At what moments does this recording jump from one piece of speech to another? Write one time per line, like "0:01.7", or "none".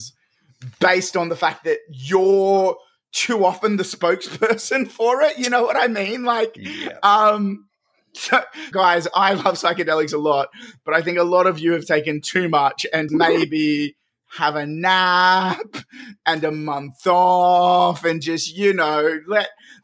0:08.7
0:13.1